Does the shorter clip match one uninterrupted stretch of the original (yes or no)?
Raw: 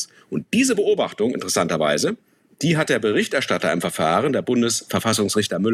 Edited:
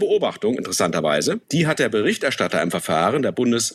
no